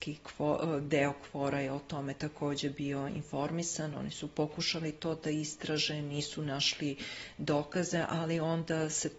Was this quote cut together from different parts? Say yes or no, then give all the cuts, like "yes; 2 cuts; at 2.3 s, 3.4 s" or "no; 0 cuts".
no; 0 cuts